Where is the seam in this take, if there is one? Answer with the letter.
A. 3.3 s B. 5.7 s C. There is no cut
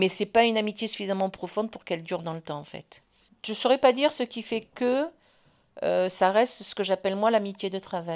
A